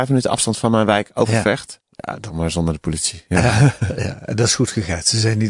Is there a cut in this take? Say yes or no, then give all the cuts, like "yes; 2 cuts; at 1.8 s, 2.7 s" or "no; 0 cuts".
yes; 1 cut; at 1.8 s